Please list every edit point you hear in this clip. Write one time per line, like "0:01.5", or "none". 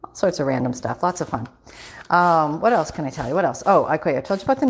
none